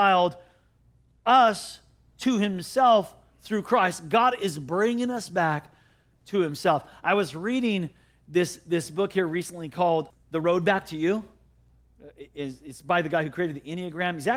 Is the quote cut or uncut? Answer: cut